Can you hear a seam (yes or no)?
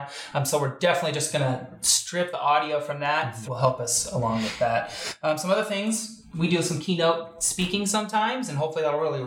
yes